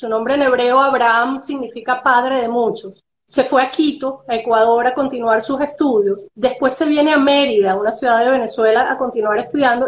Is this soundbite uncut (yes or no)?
no